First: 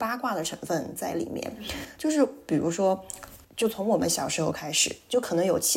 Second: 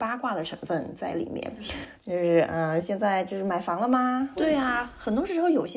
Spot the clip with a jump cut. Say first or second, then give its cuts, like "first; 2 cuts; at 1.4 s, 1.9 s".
second; 2 cuts; at 2.0 s, 4.4 s